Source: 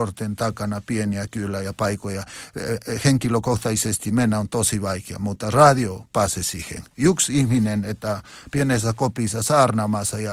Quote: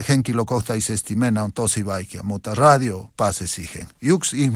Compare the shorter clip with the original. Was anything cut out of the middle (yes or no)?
no